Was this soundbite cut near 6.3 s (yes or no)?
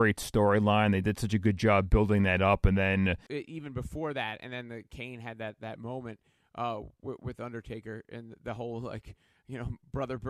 no